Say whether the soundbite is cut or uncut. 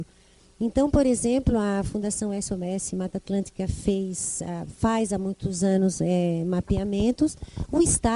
uncut